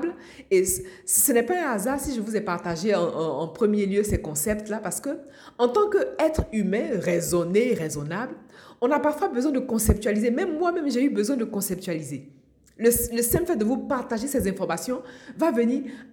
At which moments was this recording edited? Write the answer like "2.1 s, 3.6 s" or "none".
none